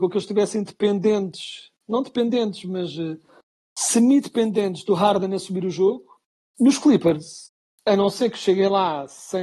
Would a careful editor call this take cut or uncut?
cut